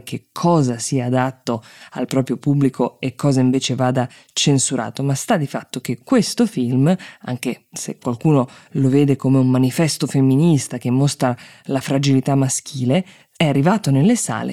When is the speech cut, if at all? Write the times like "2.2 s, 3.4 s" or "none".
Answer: none